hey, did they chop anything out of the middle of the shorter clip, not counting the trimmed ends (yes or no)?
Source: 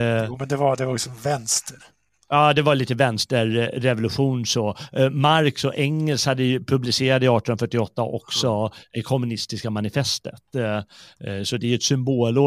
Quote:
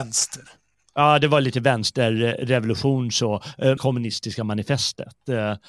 yes